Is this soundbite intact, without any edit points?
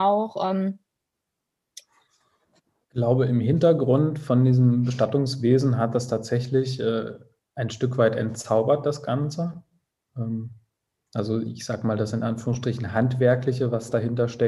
no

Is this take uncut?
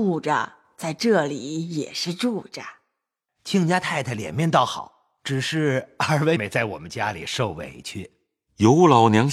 no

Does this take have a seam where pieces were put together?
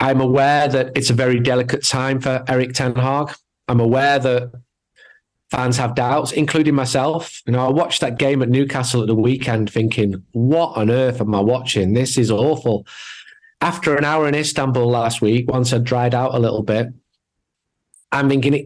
no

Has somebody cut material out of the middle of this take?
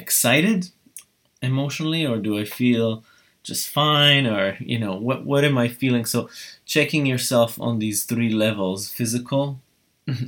no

